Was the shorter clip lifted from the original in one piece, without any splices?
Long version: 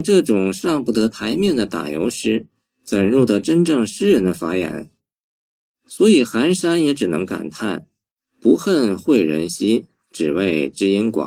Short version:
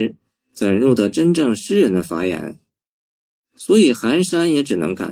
yes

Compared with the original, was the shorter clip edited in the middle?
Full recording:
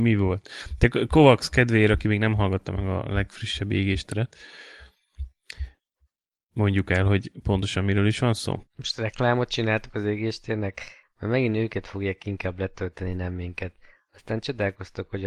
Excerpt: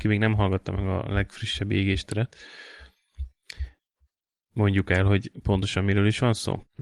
no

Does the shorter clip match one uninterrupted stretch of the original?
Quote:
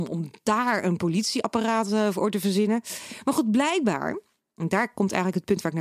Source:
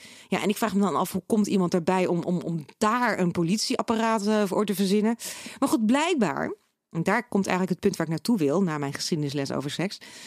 yes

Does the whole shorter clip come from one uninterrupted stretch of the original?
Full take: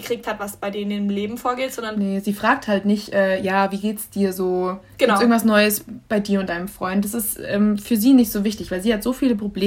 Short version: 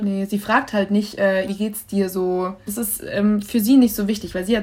no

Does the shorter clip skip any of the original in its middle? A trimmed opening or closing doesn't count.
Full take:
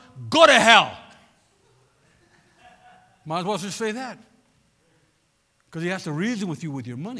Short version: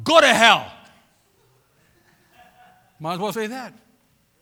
yes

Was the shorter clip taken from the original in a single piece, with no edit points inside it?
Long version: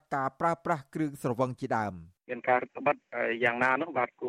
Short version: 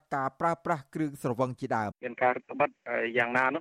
no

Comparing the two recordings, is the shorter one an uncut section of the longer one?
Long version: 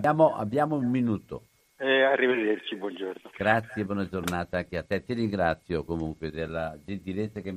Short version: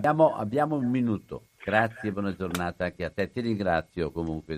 no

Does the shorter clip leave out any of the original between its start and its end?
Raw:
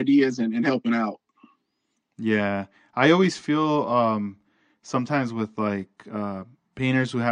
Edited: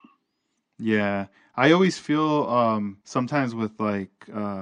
yes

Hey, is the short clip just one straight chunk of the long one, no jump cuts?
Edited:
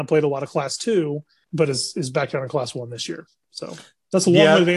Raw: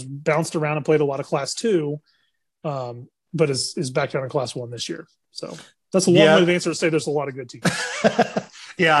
no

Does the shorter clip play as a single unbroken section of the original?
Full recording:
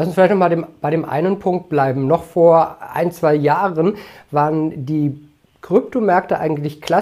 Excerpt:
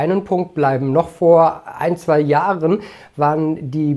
yes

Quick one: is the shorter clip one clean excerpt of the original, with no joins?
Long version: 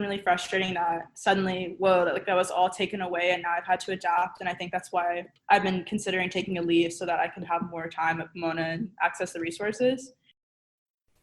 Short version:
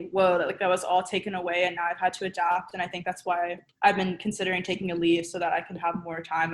yes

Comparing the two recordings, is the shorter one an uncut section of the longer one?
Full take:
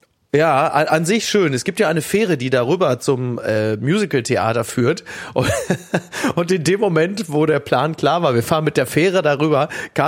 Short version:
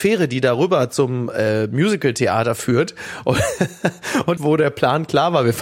no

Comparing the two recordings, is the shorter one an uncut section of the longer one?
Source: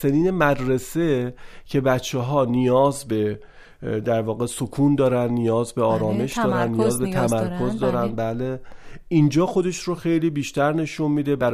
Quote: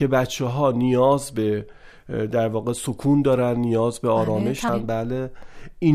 no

